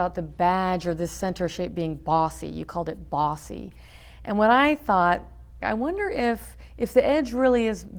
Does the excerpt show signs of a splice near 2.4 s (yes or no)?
no